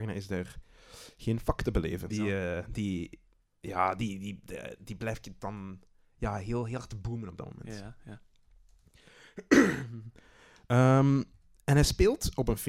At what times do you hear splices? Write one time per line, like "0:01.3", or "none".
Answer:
0:02.1

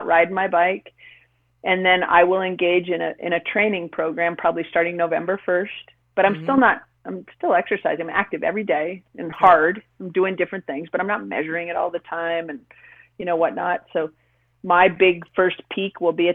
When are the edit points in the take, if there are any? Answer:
none

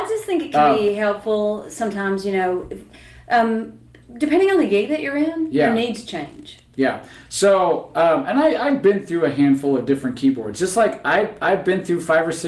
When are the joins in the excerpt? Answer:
none

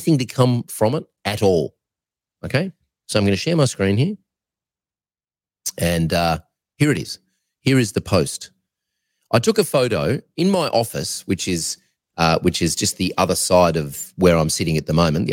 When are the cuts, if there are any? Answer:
none

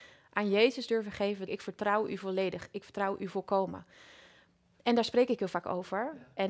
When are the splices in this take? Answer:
0:01.5

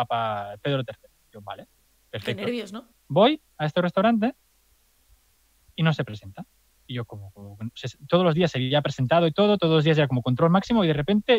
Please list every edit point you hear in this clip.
0:02.9

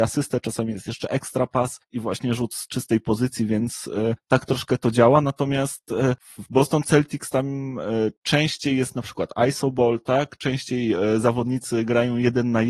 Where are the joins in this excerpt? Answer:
none

